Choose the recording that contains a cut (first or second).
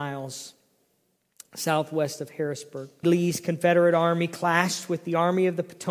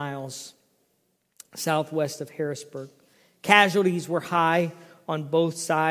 first